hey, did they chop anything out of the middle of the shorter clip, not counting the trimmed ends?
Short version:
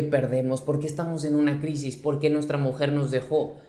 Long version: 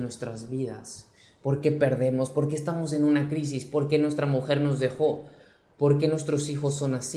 no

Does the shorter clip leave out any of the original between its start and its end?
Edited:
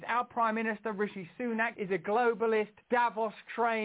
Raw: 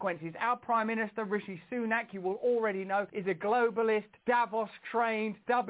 yes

